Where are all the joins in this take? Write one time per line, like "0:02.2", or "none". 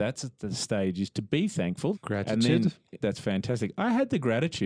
0:01.9
0:03.0